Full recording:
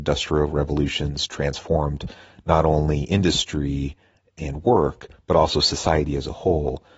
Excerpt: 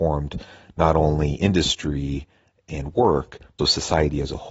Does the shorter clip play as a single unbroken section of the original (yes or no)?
no